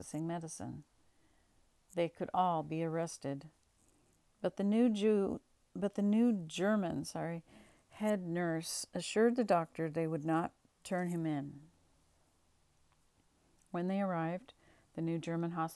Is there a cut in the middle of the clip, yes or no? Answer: no